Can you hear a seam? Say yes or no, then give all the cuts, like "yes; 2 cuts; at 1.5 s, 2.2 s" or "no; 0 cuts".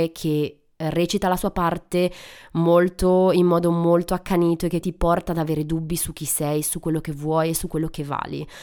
yes; 1 cut; at 4.8 s